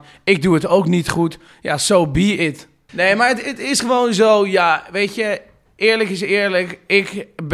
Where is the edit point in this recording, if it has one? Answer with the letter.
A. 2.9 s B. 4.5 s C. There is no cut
A